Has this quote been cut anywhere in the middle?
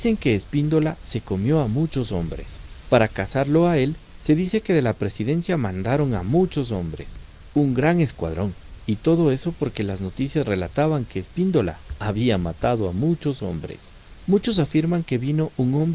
no; 0 cuts

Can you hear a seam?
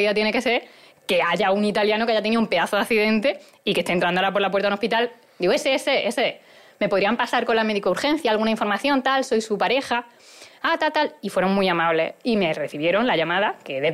no; 0 cuts

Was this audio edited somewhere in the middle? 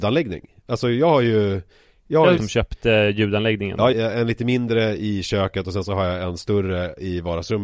yes; 2 cuts; at 2.4 s, 3.9 s

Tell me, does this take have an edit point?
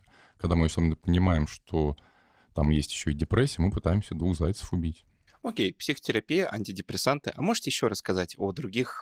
no; 0 cuts

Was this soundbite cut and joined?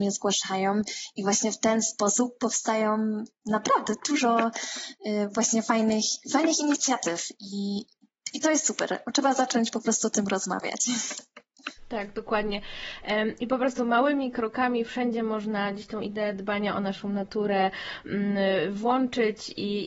no; 0 cuts

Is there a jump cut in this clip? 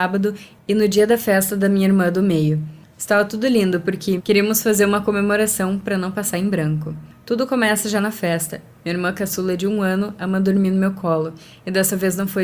yes; 1 cut; at 4.2 s

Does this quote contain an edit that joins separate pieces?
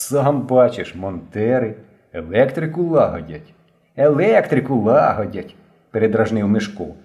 no; 0 cuts

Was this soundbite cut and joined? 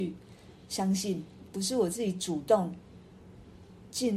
yes; 1 cut; at 1.5 s

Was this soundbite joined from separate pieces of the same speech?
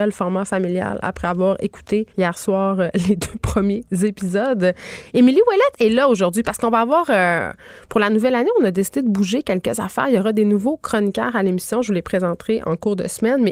yes; 1 cut; at 2.1 s

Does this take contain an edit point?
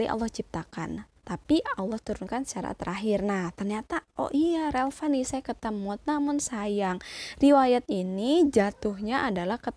yes; 1 cut; at 1.2 s

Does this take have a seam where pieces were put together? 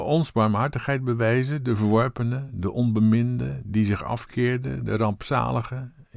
no; 0 cuts

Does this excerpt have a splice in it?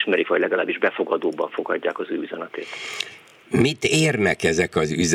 no; 0 cuts

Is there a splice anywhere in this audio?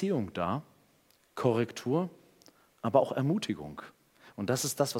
no; 0 cuts

